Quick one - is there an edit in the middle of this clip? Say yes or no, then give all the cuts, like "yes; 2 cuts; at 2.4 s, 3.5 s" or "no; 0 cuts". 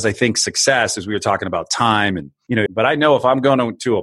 yes; 1 cut; at 2.7 s